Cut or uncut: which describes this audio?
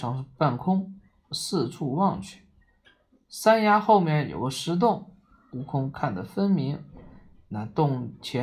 uncut